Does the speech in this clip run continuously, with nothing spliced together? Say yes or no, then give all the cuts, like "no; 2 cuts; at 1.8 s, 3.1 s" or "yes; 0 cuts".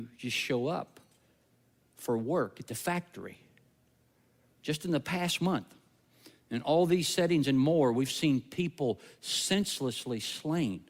yes; 0 cuts